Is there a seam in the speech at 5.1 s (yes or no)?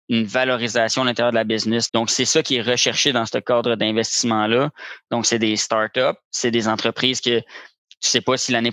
yes